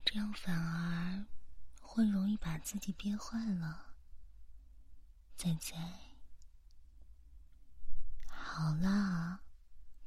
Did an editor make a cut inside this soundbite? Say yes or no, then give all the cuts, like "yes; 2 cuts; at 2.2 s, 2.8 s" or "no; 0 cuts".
yes; 1 cut; at 5.3 s